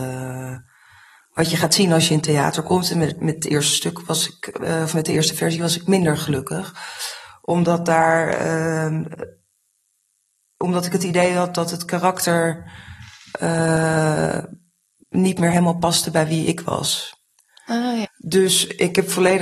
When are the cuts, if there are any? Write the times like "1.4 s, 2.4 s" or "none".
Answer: 18.0 s